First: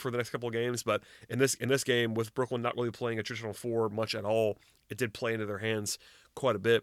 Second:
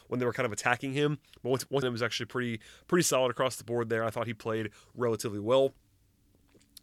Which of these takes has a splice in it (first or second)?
second